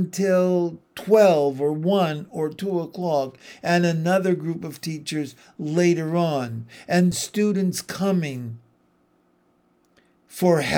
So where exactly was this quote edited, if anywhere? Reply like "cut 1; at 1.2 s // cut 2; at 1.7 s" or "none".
cut 1; at 7.1 s